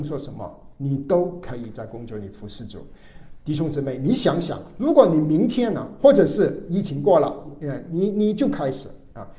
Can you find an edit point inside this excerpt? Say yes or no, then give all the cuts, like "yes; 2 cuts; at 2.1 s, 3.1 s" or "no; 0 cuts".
no; 0 cuts